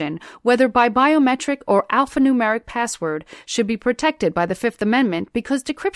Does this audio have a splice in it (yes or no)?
no